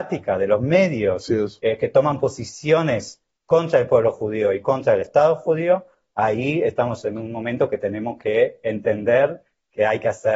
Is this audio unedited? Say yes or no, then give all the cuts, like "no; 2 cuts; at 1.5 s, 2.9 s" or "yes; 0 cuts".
yes; 0 cuts